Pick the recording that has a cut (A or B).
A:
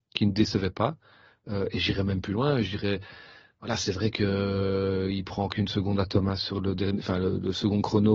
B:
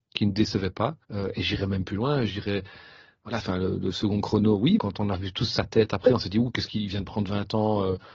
B